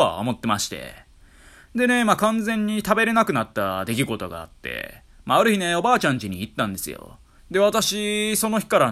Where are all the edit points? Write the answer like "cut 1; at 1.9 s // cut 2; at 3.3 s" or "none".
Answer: cut 1; at 7.4 s